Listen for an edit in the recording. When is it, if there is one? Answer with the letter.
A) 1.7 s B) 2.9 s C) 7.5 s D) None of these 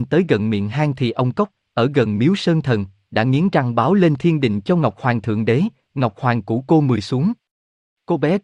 D